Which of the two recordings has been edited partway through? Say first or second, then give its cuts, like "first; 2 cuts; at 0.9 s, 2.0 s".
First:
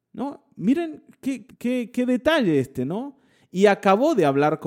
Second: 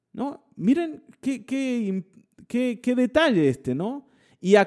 first; 1 cut; at 1.5 s